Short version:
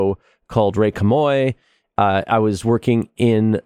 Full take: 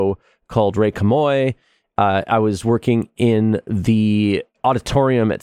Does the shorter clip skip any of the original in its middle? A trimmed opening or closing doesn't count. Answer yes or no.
no